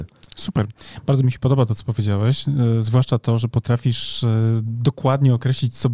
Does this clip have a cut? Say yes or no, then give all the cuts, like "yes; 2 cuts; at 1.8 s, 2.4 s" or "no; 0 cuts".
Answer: no; 0 cuts